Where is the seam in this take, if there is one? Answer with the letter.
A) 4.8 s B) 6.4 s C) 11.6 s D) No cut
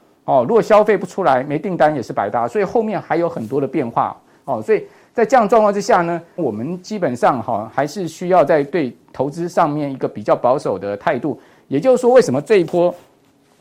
B